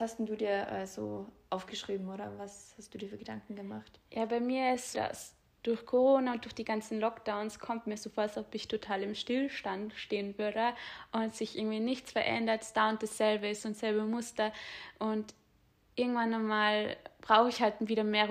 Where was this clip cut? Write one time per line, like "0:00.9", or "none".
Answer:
0:04.9